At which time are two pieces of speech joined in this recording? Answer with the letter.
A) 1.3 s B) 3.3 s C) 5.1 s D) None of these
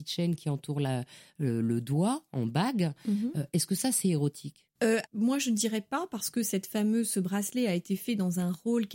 C